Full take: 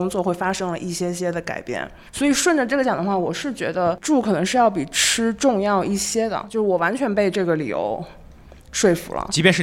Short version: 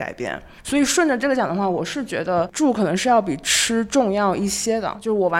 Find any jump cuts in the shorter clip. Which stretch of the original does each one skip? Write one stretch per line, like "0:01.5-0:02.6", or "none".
none